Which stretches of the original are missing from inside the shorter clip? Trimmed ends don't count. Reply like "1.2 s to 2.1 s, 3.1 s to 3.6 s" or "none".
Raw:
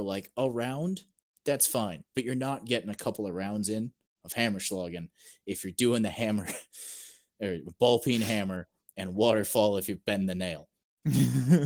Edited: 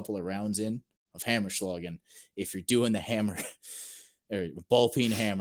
none